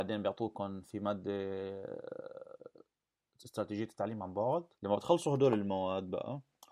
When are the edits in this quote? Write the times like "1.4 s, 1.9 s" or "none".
4.7 s